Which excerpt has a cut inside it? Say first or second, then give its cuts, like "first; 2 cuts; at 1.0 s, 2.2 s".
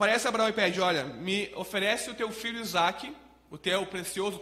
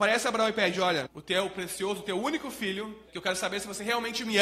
second; 2 cuts; at 1.1 s, 3.1 s